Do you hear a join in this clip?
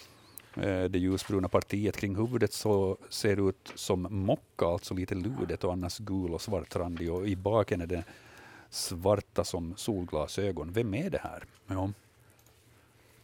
yes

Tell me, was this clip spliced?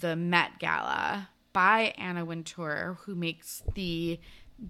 no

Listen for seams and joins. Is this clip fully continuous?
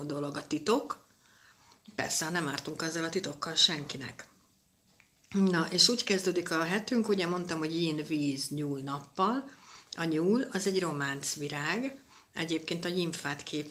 yes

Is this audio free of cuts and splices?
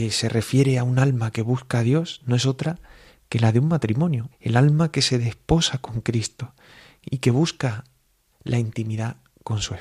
no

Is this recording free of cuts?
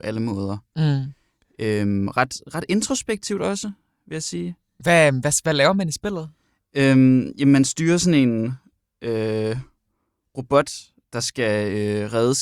yes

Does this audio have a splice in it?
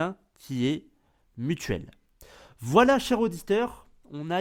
no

